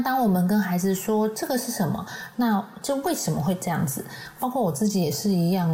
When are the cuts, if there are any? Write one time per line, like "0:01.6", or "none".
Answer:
0:02.3
0:04.4